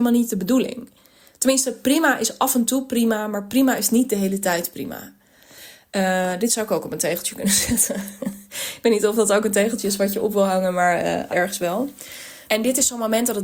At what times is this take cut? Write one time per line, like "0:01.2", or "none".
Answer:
0:11.3
0:12.5